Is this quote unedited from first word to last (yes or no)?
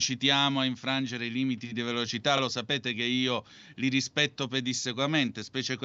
yes